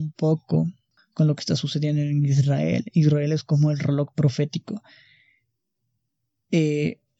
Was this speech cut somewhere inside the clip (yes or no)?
no